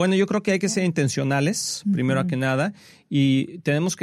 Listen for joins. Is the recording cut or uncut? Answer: uncut